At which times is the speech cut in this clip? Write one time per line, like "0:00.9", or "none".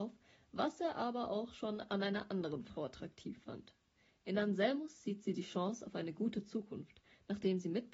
none